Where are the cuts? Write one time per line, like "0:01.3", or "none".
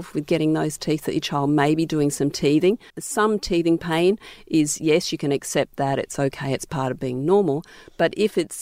0:02.9